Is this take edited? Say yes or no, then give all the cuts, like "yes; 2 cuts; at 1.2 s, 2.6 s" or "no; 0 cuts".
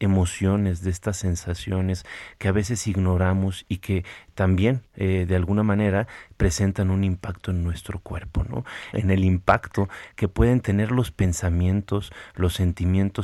yes; 1 cut; at 8.9 s